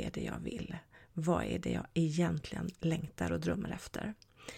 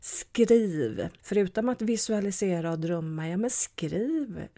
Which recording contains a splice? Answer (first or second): second